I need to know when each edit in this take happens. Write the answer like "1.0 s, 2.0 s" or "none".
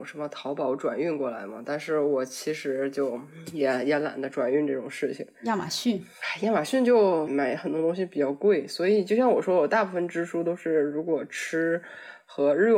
7.3 s